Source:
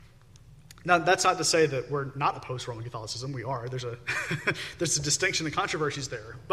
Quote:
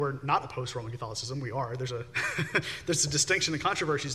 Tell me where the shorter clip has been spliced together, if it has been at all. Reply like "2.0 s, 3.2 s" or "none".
none